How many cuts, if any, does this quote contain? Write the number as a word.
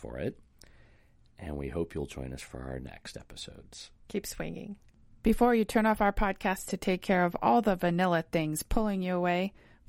one